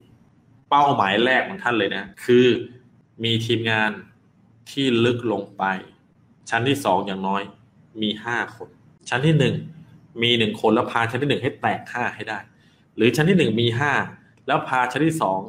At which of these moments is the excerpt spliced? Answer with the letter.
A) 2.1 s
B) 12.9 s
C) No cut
A